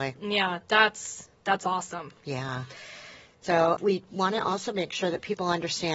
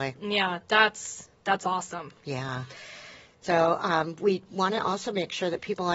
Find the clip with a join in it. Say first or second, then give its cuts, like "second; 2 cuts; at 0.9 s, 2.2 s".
first; 1 cut; at 3.8 s